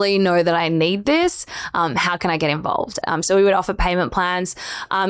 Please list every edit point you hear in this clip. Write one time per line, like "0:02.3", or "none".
0:03.0